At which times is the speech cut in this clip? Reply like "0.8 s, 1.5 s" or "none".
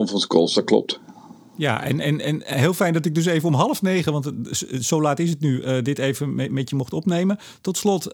none